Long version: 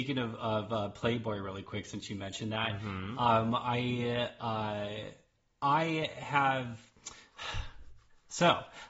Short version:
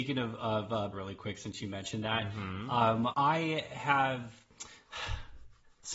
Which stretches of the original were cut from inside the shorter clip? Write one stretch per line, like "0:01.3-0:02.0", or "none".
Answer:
0:00.9-0:01.4
0:03.6-0:05.6